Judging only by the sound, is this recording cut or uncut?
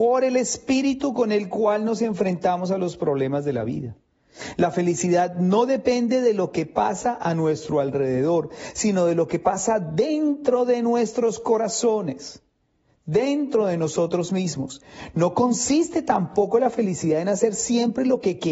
uncut